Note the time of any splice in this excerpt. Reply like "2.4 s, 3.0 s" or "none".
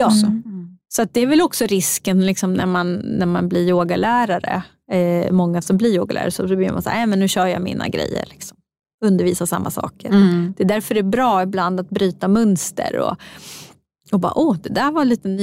none